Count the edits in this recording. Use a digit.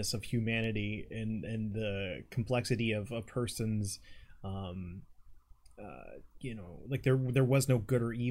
0